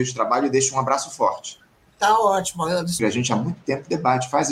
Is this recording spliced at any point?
yes; 1 cut; at 3.0 s

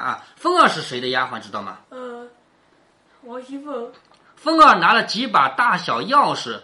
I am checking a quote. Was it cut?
yes; 2 cuts; at 1.8 s, 4.1 s

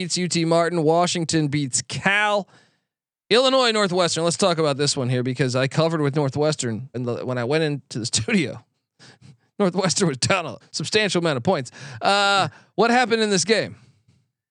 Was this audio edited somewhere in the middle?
yes; 2 cuts; at 6.9 s, 10.6 s

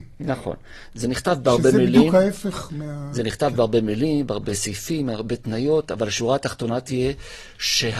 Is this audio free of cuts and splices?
yes; 0 cuts

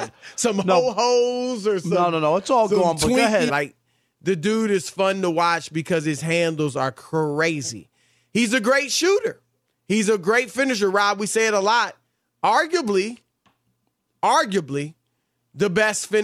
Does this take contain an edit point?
yes; 1 cut; at 3.5 s

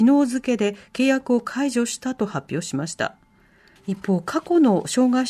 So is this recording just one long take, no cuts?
no; 1 cut; at 3.8 s

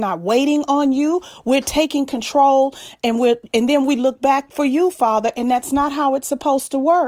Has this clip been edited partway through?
no; 0 cuts

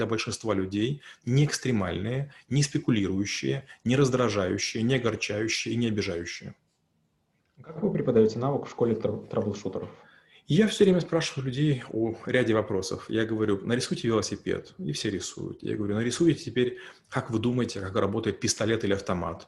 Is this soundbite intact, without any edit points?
yes; 0 cuts

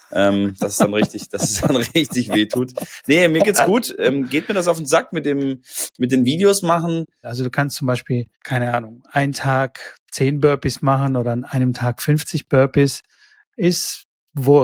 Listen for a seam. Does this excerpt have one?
yes; 2 cuts; at 7.2 s, 8.3 s

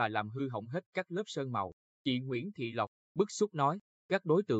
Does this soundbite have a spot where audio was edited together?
yes; 1 cut; at 3.0 s

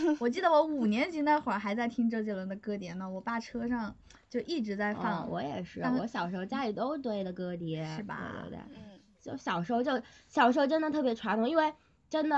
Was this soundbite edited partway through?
no; 0 cuts

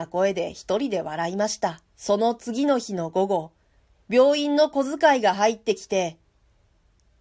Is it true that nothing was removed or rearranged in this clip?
no; 1 cut; at 1.9 s

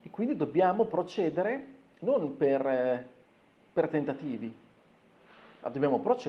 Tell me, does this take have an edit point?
no; 0 cuts

